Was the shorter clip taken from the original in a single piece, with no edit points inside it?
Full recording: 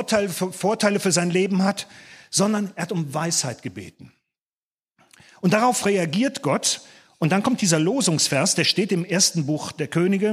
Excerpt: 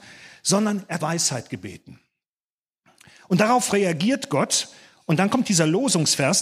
no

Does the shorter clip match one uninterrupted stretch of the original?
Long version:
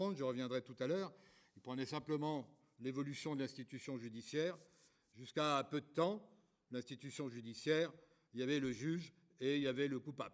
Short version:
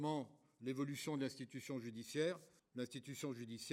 no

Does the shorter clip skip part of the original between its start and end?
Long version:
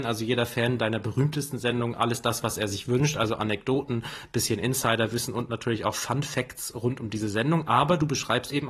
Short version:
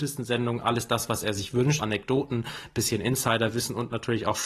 yes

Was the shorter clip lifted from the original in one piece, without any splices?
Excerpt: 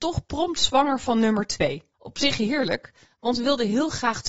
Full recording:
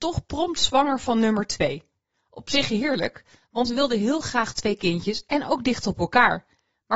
no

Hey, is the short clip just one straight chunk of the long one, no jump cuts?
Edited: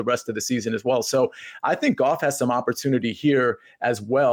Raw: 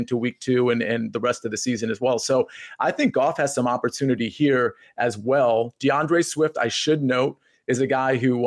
yes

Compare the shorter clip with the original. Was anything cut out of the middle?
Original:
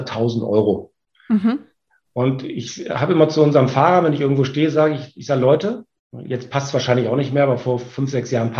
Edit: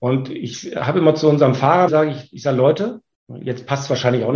yes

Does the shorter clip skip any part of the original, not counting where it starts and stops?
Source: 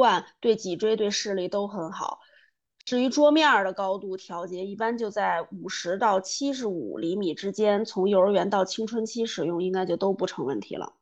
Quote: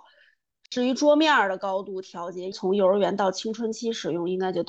yes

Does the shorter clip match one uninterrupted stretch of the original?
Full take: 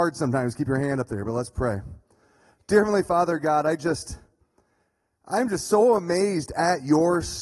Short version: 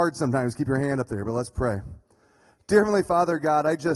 yes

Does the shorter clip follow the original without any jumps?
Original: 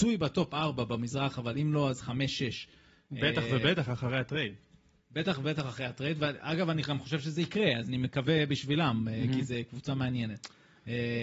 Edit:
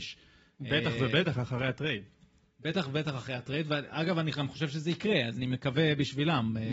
yes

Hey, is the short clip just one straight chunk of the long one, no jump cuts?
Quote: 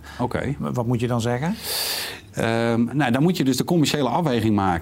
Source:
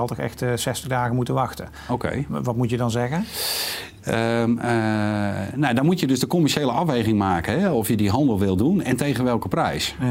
no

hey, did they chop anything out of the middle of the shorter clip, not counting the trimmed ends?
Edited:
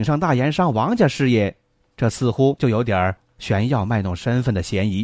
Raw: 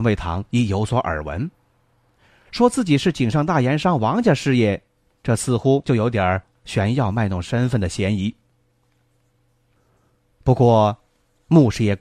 no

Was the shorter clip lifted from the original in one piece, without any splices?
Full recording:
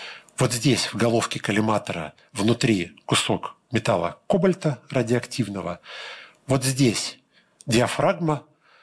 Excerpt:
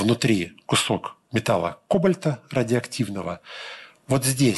yes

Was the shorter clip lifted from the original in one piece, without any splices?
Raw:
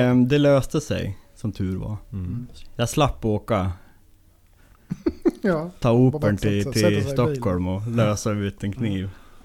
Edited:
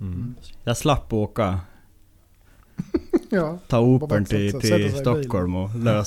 yes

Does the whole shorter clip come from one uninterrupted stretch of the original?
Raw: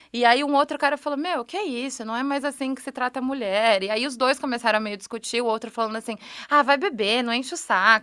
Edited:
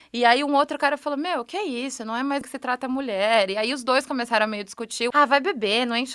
no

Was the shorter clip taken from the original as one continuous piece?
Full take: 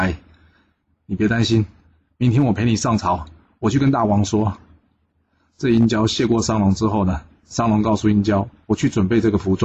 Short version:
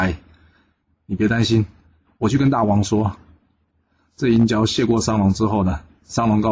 no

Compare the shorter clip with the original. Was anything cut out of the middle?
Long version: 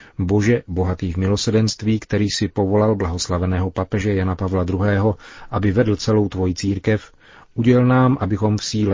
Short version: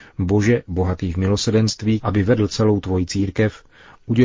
yes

